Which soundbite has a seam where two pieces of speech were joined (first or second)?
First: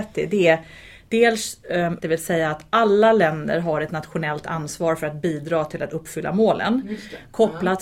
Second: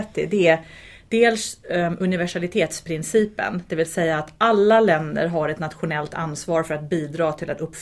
first